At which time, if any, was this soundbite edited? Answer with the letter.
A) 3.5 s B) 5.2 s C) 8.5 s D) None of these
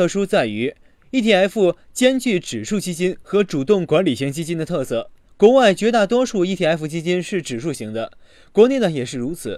D